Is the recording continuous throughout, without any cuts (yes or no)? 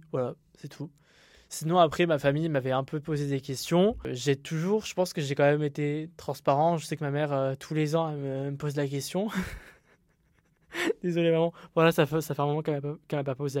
yes